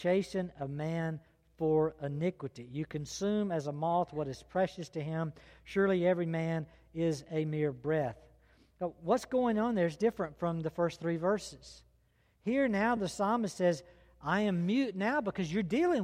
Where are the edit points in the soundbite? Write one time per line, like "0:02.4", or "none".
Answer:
none